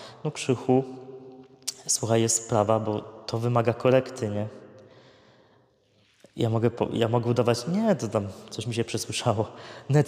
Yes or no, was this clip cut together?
no